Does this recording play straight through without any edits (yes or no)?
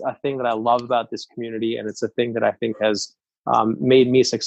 yes